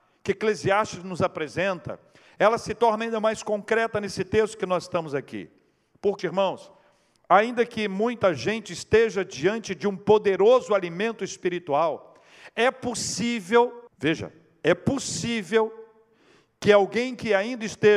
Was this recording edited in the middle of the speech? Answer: yes; 2 cuts; at 6.2 s, 13.9 s

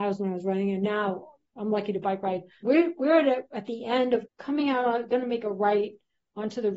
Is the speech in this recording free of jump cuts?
no; 2 cuts; at 2.6 s, 4.3 s

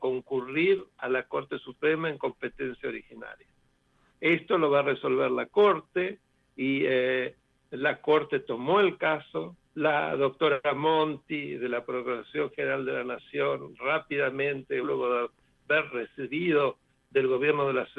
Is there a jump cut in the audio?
yes; 3 cuts; at 4.1 s, 9.7 s, 14.8 s

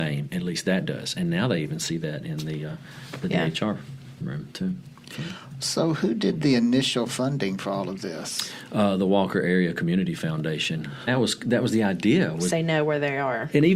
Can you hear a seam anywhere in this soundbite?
yes; 2 cuts; at 11.1 s, 12.5 s

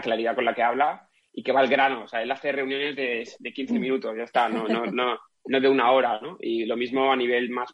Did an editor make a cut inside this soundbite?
no; 0 cuts

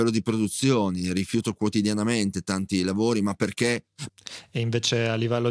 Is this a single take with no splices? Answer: no; 1 cut; at 4.1 s

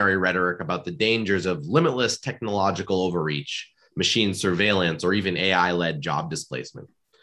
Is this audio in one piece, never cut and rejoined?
yes; 0 cuts

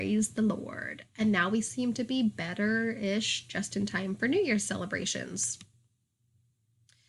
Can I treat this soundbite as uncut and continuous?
yes; 0 cuts

